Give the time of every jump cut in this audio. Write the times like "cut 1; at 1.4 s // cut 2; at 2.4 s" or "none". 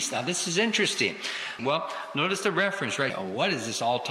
cut 1; at 1.6 s // cut 2; at 3.1 s